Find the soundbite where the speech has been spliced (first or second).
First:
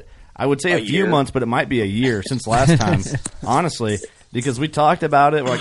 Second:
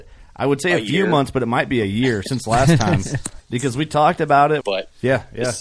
second